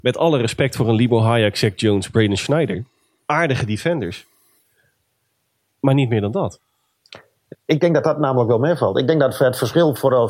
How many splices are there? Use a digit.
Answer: 1